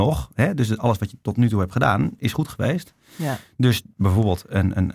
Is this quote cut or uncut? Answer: uncut